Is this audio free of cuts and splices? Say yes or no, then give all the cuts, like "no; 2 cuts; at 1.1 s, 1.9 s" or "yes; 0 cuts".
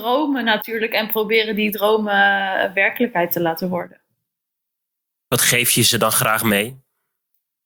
yes; 0 cuts